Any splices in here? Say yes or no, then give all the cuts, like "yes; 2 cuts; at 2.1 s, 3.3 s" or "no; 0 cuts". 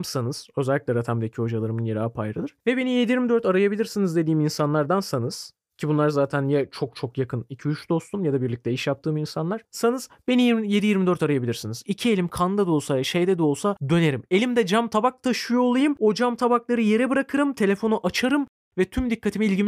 no; 0 cuts